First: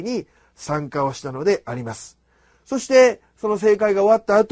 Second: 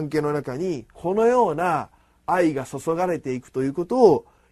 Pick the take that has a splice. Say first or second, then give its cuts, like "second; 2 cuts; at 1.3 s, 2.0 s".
second; 1 cut; at 0.9 s